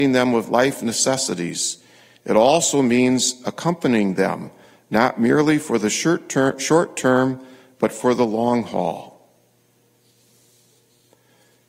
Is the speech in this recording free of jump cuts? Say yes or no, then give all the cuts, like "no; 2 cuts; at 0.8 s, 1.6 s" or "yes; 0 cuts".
yes; 0 cuts